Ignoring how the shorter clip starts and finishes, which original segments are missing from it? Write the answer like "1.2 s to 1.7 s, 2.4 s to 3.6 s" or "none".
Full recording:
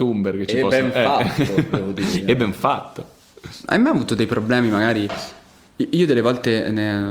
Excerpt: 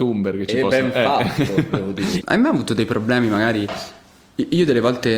2.2 s to 3.6 s